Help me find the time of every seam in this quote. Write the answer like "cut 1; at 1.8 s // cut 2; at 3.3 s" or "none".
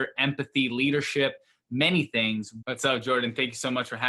cut 1; at 2.6 s